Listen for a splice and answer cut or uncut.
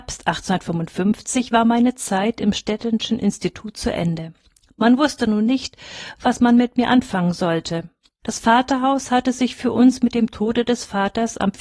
cut